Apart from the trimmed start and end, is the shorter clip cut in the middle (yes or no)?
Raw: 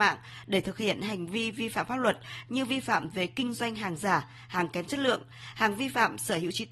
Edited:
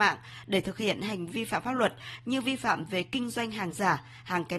yes